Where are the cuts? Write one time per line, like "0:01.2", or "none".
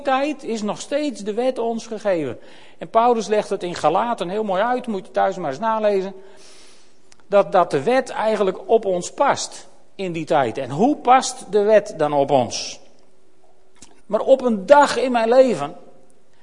0:14.0